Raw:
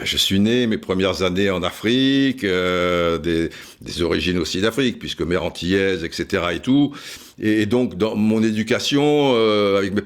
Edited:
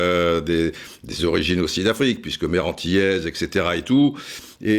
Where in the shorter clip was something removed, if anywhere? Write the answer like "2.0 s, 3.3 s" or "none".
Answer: none

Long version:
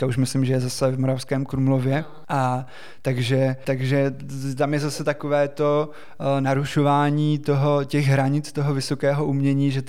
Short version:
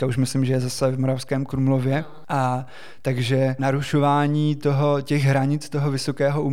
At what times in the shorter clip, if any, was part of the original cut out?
3.6 s

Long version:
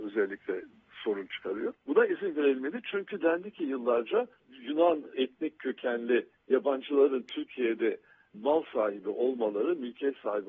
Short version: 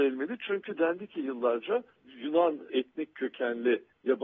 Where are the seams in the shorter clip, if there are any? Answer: none

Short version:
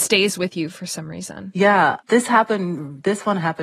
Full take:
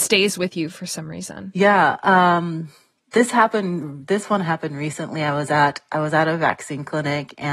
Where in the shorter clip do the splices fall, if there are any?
2.0 s

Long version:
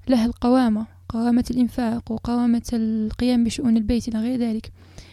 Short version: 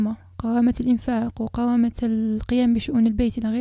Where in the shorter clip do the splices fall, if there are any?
none

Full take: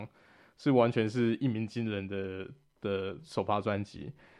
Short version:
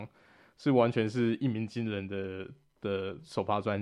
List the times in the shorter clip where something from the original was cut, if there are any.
none

